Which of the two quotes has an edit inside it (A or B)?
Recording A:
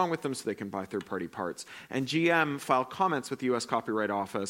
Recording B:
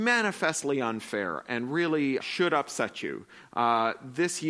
B